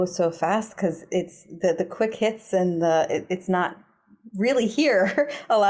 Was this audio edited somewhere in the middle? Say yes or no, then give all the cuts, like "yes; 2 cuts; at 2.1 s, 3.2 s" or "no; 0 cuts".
no; 0 cuts